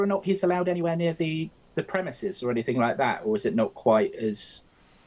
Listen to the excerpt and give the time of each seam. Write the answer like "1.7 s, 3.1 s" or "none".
none